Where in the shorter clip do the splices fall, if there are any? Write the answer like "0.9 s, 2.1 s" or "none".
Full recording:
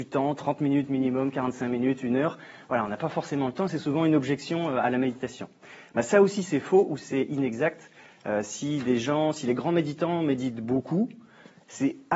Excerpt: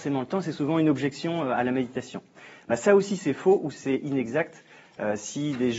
none